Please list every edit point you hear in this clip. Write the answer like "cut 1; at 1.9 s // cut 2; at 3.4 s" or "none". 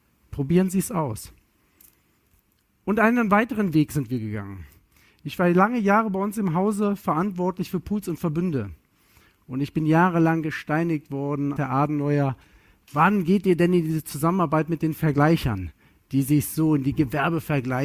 cut 1; at 11.6 s